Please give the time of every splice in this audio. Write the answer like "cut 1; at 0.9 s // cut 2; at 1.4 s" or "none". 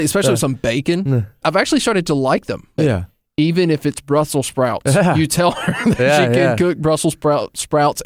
cut 1; at 1.4 s // cut 2; at 2.8 s